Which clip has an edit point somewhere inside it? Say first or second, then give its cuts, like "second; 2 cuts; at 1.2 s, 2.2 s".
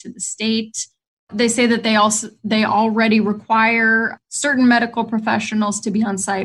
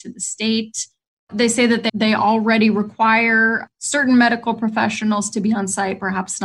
second; 1 cut; at 1.9 s